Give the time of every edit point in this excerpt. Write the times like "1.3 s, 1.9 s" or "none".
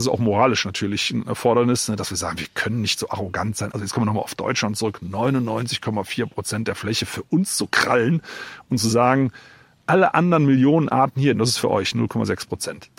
3.7 s, 11.3 s